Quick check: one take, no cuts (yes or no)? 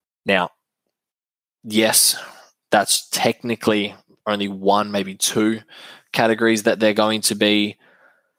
yes